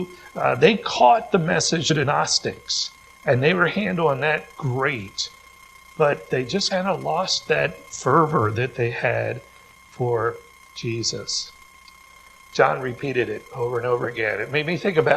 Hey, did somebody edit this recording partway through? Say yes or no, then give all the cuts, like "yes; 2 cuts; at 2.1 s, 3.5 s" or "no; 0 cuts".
no; 0 cuts